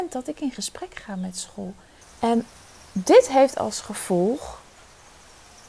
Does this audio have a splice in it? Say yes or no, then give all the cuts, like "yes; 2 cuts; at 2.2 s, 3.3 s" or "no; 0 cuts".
yes; 1 cut; at 2.0 s